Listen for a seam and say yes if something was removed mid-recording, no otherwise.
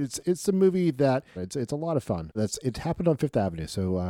yes